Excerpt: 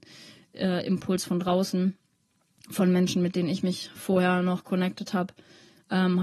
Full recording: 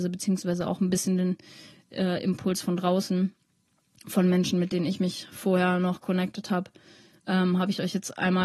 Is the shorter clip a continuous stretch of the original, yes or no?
yes